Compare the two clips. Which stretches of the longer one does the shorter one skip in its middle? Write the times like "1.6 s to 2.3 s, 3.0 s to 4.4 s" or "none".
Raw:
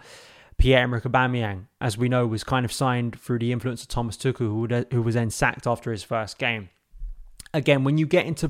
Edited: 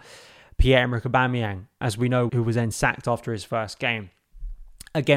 2.3 s to 4.9 s